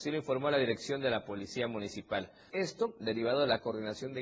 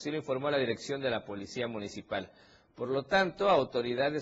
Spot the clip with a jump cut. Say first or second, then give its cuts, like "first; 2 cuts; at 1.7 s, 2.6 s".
first; 1 cut; at 2.5 s